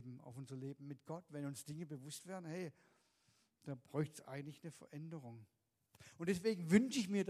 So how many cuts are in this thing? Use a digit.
0